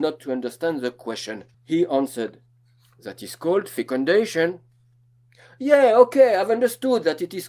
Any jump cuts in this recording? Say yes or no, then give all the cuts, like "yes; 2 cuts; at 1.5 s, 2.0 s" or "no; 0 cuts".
yes; 1 cut; at 1.5 s